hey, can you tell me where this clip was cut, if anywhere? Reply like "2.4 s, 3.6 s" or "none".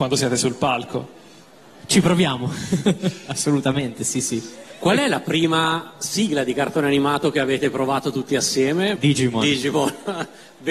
9.0 s